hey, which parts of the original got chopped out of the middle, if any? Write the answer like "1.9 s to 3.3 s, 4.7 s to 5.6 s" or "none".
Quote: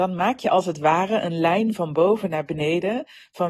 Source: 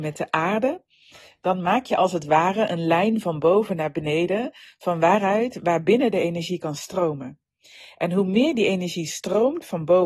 none